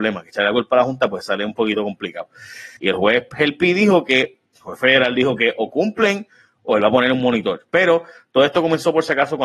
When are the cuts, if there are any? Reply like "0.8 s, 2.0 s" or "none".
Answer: 2.8 s, 7.7 s

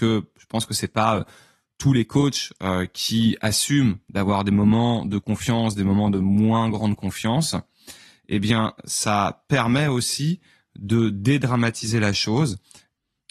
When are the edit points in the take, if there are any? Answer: none

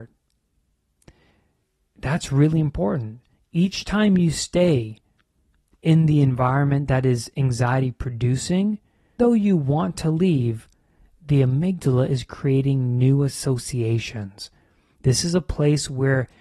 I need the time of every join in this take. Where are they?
9.2 s

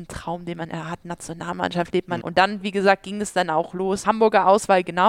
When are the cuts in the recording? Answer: 2.2 s, 4.0 s

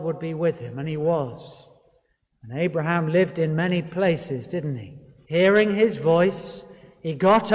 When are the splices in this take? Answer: 2.3 s, 5.2 s

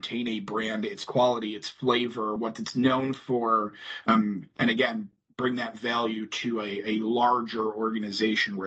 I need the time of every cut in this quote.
none

